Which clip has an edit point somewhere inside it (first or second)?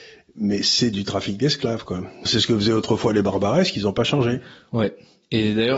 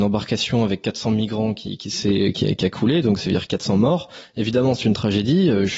first